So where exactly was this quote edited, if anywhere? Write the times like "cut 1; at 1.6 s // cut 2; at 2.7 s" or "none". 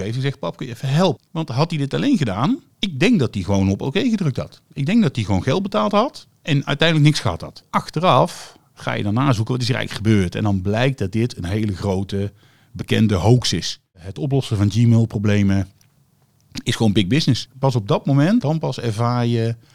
cut 1; at 1.2 s // cut 2; at 18.4 s